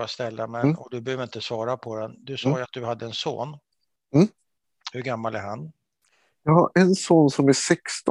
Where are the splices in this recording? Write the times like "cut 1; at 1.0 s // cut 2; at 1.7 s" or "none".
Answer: none